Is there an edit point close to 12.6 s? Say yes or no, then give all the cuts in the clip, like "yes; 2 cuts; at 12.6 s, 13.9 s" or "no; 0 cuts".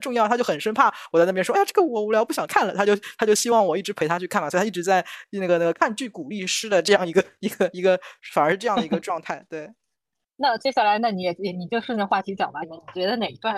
yes; 1 cut; at 12.6 s